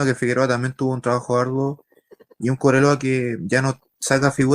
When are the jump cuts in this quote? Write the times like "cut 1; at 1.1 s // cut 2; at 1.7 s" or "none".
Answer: none